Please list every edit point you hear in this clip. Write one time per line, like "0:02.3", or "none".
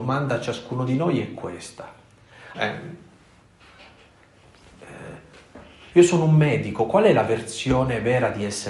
0:02.5
0:05.9